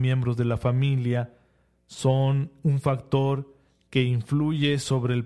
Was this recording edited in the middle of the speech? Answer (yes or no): no